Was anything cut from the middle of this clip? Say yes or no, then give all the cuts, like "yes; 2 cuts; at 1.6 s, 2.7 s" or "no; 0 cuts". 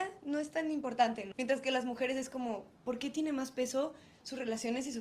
yes; 1 cut; at 1.3 s